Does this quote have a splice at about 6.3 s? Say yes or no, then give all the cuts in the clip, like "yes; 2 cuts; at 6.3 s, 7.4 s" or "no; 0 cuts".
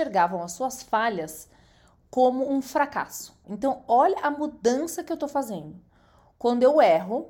no; 1 cut; at 3.4 s